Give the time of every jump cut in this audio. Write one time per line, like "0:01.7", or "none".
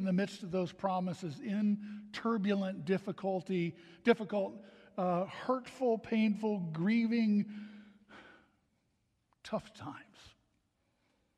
none